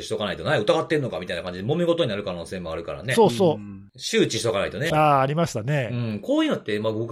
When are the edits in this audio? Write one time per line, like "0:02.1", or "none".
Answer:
0:04.9